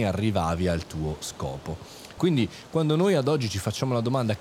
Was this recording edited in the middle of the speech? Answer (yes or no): yes